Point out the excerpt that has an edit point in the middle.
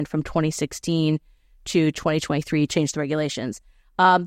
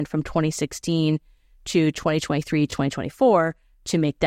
first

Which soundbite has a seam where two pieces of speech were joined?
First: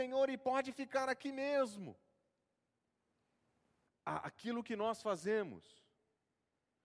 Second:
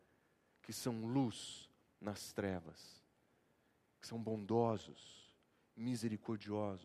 first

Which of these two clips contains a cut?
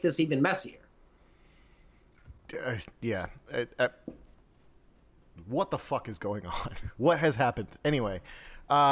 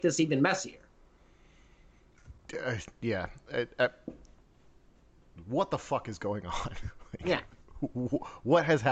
first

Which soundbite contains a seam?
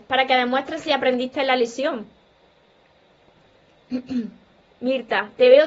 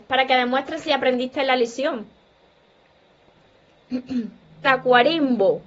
second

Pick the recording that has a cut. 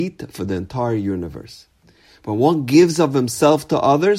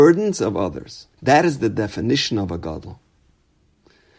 second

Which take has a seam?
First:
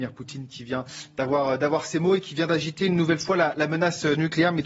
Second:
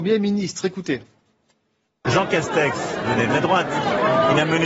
second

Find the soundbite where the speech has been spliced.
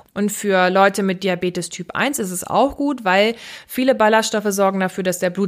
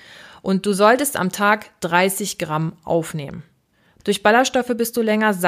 second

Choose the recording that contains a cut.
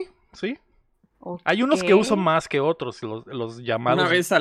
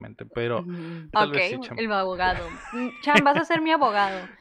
second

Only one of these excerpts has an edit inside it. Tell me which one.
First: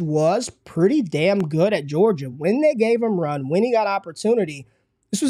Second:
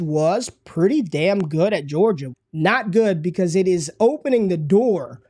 second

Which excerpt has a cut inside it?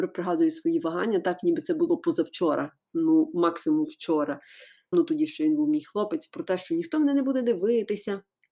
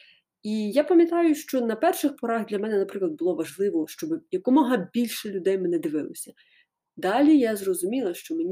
first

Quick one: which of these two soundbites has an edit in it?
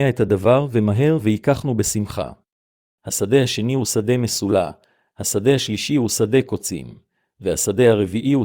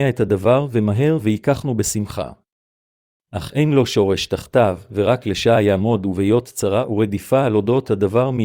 first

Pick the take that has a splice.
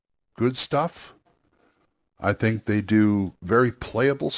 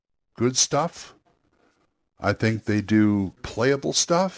second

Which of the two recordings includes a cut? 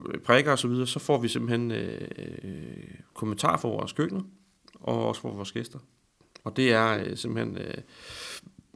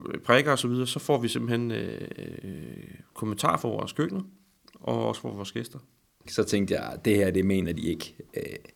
second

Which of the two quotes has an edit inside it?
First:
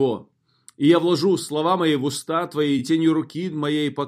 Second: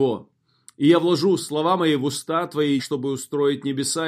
second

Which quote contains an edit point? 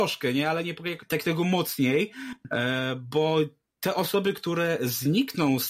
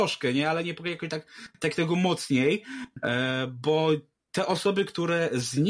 first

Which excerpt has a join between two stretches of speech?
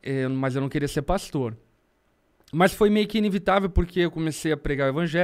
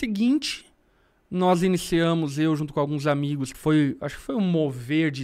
second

